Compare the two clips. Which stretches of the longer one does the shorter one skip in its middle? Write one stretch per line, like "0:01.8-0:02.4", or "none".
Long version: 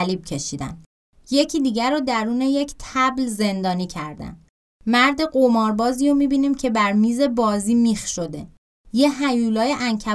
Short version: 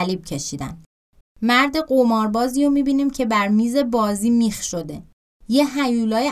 0:01.2-0:04.6

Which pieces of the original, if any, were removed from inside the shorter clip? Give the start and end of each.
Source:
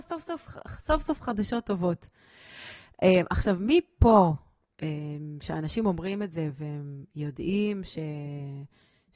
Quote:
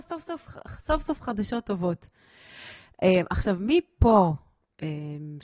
none

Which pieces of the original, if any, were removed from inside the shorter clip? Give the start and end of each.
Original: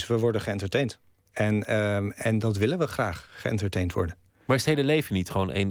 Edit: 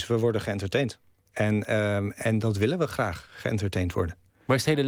none

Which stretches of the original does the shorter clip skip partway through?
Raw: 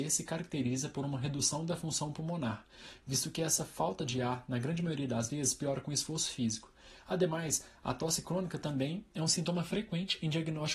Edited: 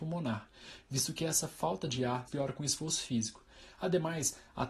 0:04.4-0:05.6

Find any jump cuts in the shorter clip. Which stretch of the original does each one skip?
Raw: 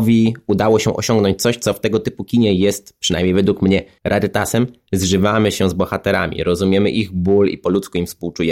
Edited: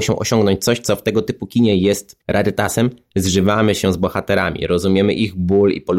0:03.0-0:04.0

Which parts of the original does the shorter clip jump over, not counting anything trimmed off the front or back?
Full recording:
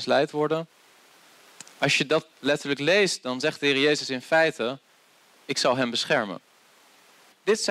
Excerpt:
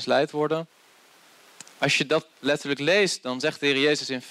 none

